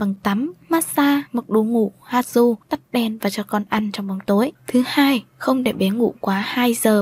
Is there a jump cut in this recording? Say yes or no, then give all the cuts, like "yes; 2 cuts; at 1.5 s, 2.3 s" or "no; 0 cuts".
yes; 2 cuts; at 2.6 s, 4.6 s